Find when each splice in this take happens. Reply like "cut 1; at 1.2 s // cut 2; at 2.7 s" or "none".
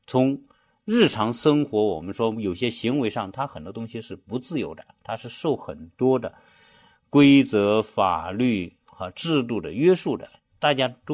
none